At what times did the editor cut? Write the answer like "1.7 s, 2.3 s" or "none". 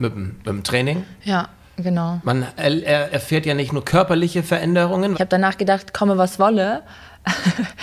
5.1 s